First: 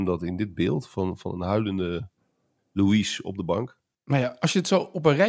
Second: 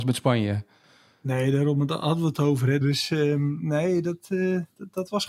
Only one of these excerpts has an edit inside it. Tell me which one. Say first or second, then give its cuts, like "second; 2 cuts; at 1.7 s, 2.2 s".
second; 1 cut; at 2.8 s